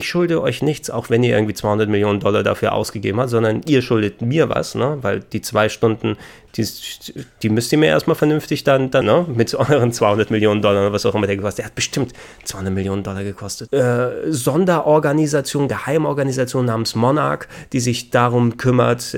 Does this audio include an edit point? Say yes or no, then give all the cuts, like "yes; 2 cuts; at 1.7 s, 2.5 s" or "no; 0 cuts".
yes; 2 cuts; at 9.0 s, 13.7 s